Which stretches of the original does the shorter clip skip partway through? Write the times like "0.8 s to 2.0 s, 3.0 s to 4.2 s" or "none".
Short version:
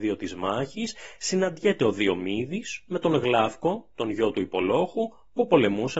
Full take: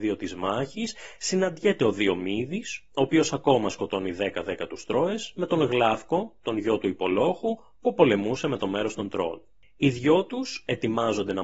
2.9 s to 5.3 s

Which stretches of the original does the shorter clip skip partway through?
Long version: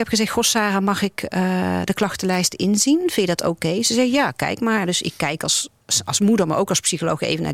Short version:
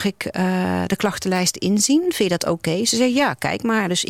none

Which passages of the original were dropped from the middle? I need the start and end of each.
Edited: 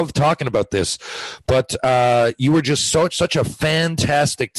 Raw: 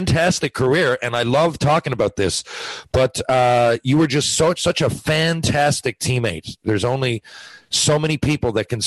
none

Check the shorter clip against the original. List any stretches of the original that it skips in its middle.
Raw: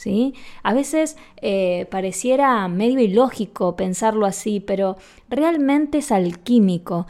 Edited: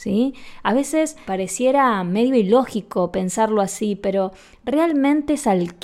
1.2 s to 1.9 s

